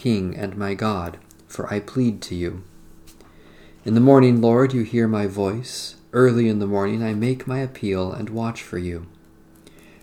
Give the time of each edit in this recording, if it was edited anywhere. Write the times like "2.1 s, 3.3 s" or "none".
none